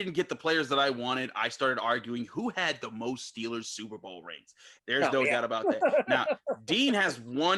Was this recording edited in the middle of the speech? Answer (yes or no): yes